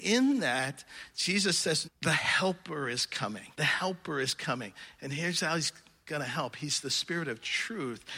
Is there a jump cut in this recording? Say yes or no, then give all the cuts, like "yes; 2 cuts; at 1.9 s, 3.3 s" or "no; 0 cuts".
yes; 2 cuts; at 1.8 s, 3.5 s